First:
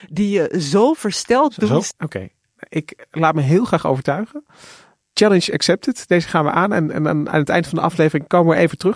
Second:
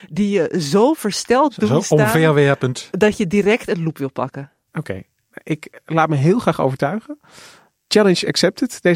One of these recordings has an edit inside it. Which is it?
first; 1 cut; at 1.9 s

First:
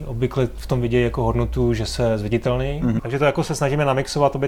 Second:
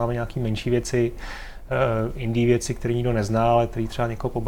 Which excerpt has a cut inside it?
first; 1 cut; at 3.0 s

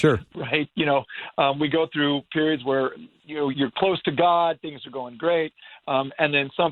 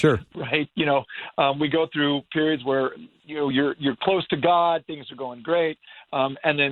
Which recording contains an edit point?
first; 1 cut; at 3.5 s

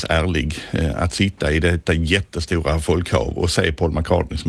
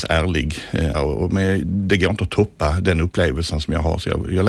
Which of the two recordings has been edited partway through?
second; 1 cut; at 0.9 s

